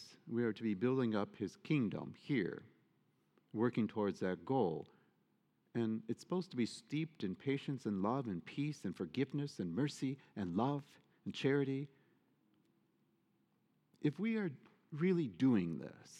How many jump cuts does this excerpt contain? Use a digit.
0